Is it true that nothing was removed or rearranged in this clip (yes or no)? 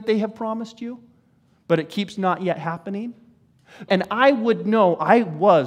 no